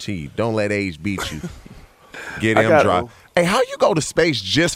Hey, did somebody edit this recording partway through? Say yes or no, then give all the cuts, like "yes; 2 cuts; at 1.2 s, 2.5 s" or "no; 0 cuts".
no; 0 cuts